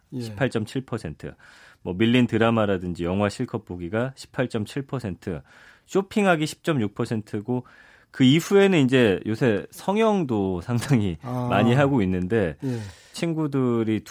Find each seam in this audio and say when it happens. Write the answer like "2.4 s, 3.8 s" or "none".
13.1 s